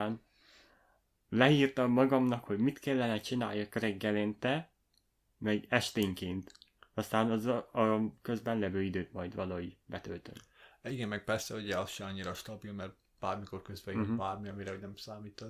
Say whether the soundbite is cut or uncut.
uncut